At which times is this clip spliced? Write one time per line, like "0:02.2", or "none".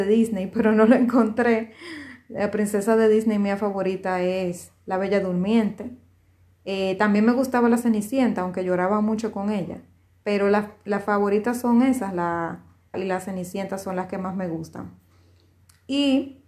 0:12.9